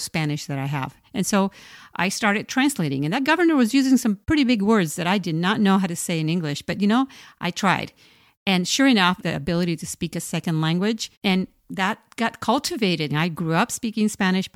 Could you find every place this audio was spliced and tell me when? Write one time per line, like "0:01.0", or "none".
0:09.2
0:11.1
0:13.1